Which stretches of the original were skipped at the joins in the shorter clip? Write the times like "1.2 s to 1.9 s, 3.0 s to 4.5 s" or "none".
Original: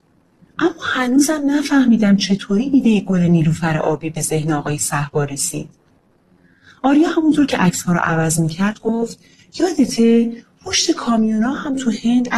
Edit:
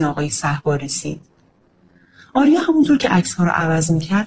none